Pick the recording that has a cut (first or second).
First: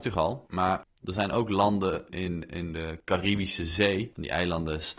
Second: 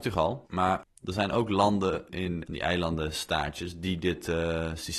second